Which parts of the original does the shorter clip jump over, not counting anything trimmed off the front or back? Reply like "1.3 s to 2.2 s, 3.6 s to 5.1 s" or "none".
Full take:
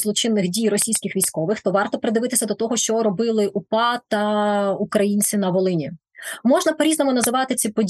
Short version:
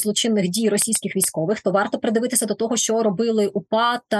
none